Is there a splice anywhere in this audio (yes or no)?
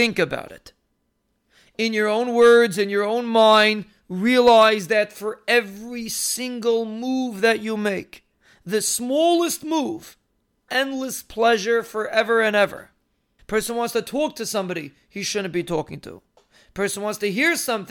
yes